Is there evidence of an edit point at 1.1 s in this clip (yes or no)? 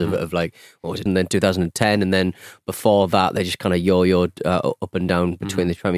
yes